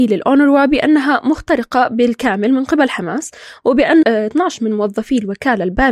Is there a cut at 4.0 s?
yes; 1 cut; at 4.0 s

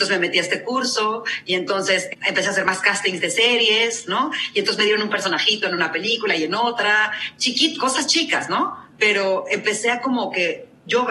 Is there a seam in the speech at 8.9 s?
yes; 1 cut; at 8.9 s

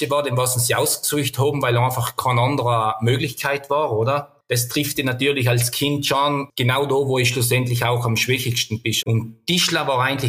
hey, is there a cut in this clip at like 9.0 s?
yes; 1 cut; at 9.0 s

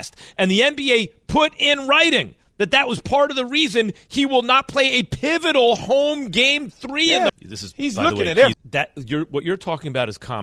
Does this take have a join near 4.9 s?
no; 2 cuts; at 7.3 s, 8.5 s

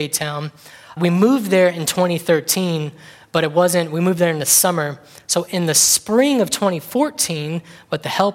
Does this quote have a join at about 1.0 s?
yes; 1 cut; at 1.0 s

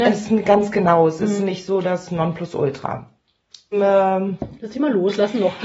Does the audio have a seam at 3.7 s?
yes; 1 cut; at 3.7 s

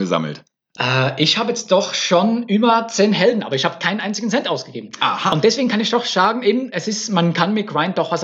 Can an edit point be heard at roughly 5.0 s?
no; 0 cuts

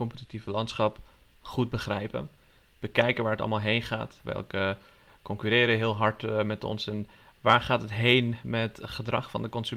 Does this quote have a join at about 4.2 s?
yes; 1 cut; at 4.2 s

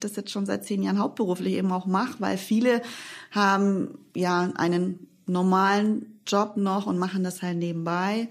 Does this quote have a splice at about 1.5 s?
no; 0 cuts

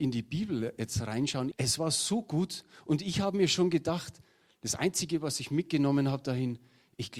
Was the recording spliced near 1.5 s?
yes; 1 cut; at 1.5 s

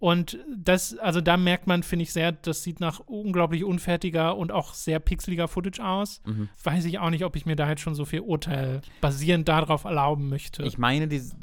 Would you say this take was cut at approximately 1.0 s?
no; 1 cut; at 6.5 s

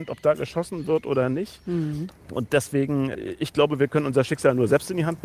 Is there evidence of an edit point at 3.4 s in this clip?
no; 1 cut; at 2.1 s

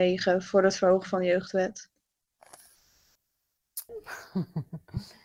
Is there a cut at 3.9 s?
yes; 1 cut; at 3.9 s

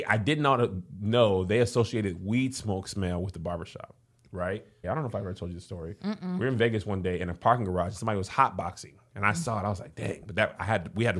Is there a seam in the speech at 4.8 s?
yes; 1 cut; at 4.8 s

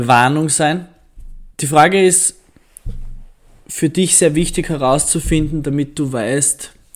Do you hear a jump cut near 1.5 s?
yes; 1 cut; at 1.5 s

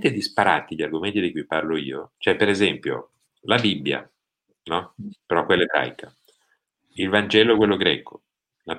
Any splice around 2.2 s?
yes; 1 cut; at 2.2 s

